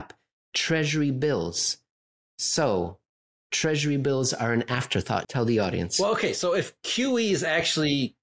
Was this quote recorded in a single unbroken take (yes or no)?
no